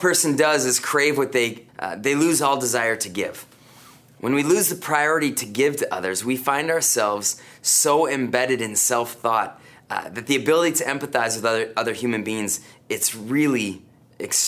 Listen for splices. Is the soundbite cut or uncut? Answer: cut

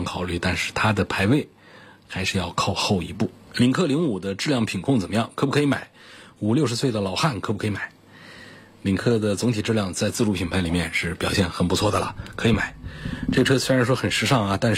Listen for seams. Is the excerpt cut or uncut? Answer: uncut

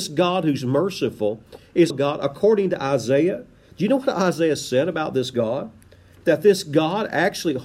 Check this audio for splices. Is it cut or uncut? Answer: cut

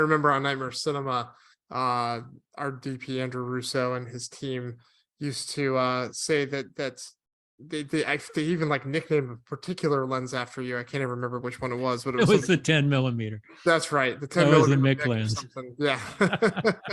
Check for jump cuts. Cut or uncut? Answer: uncut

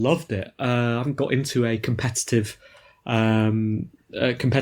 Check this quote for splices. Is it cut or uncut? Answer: uncut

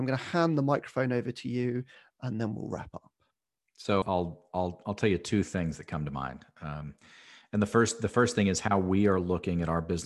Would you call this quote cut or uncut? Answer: cut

